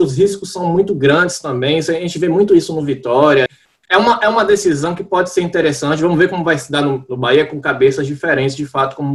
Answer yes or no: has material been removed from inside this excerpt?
yes